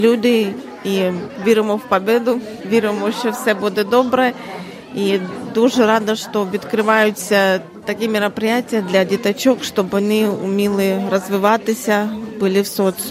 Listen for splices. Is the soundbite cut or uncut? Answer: uncut